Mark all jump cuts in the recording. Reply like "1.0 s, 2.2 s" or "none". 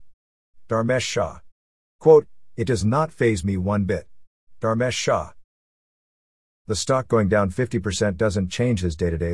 1.8 s

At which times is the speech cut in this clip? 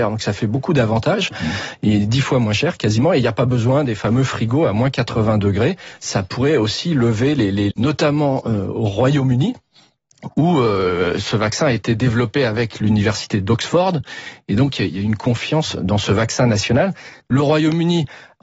7.7 s, 17.2 s

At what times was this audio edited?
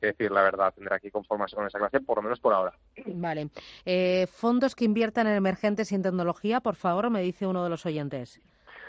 none

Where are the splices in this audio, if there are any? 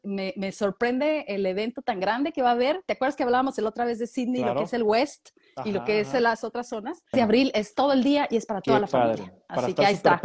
7.1 s

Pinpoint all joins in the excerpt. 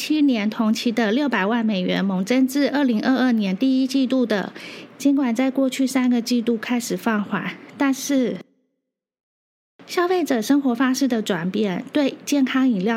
4.9 s

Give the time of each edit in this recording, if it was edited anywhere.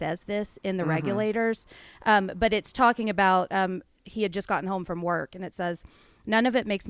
none

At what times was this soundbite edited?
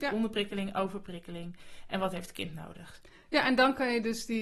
none

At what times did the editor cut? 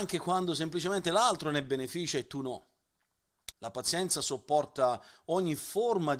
3.5 s

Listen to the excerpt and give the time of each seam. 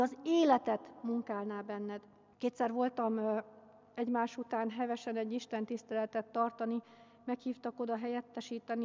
2.3 s

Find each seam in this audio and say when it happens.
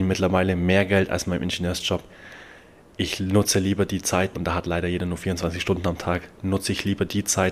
4.3 s

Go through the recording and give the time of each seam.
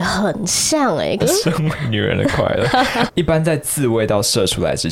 1.2 s, 3.1 s

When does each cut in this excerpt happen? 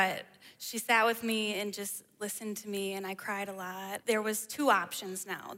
4.0 s

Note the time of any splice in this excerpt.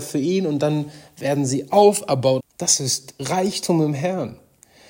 2.4 s

